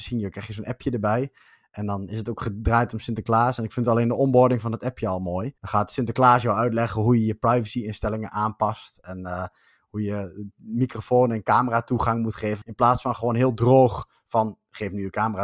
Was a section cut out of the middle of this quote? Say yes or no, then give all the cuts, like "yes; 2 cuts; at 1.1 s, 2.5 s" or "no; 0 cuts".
yes; 2 cuts; at 5.6 s, 12.6 s